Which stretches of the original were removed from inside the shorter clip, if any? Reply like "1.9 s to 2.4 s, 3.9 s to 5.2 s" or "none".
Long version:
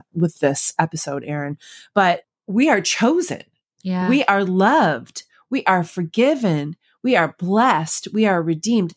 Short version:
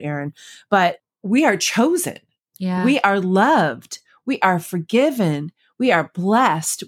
none